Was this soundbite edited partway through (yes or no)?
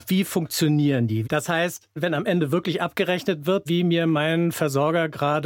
yes